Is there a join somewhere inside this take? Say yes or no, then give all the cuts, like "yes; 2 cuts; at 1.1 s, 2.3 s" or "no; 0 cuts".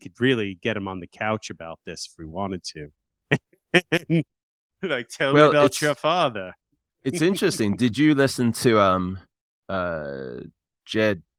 no; 0 cuts